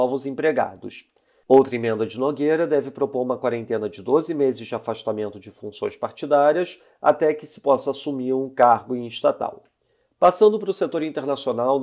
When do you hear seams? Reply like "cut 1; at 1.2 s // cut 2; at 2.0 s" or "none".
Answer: cut 1; at 1.4 s